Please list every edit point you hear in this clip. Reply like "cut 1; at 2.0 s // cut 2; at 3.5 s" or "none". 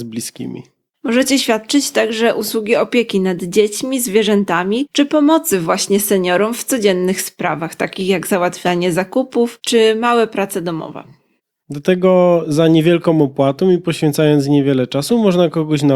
cut 1; at 11.6 s

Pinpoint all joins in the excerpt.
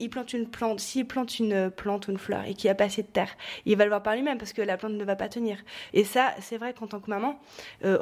cut 1; at 5.9 s

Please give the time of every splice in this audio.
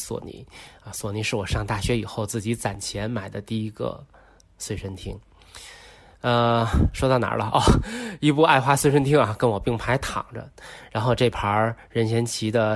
none

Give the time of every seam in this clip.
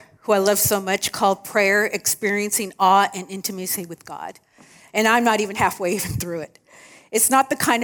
cut 1; at 4.9 s

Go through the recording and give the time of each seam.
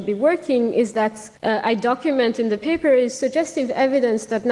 cut 1; at 1.4 s

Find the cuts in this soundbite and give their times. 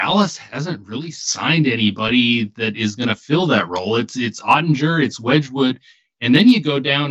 none

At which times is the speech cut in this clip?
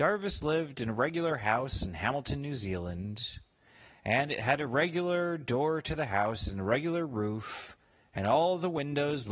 none

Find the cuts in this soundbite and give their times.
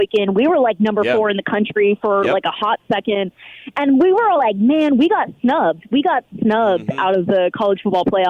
none

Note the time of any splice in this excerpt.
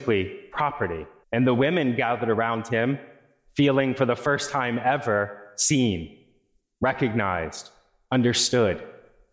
cut 1; at 1.2 s

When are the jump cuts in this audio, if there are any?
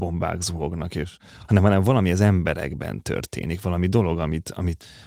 none

